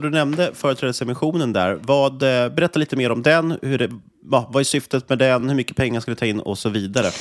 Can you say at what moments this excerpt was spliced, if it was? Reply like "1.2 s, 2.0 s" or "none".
none